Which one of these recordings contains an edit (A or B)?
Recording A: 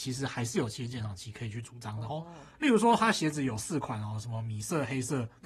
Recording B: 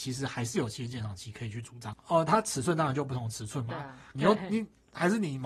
B